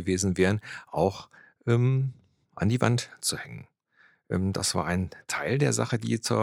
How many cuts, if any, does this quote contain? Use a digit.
0